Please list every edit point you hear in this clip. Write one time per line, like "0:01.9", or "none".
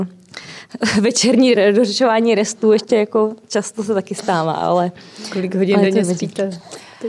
0:01.6